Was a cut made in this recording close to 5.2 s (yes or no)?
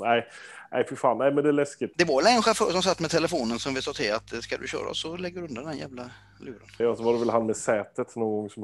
no